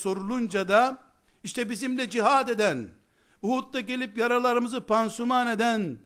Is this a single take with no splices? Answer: yes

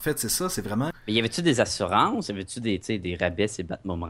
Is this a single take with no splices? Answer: no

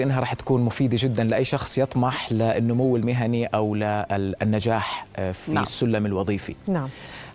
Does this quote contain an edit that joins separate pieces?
no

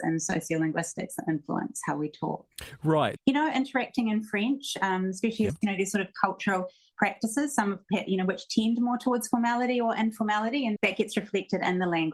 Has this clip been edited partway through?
yes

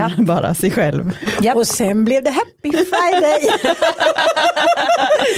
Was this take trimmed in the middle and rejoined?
no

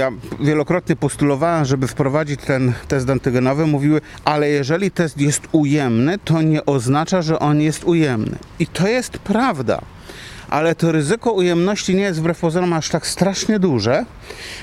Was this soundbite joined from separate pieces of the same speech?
no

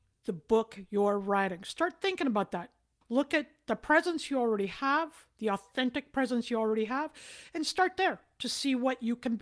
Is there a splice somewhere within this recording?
yes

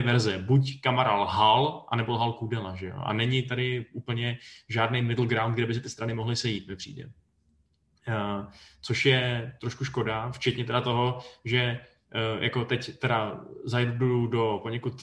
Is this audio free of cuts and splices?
yes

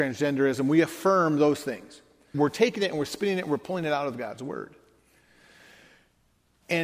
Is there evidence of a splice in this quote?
yes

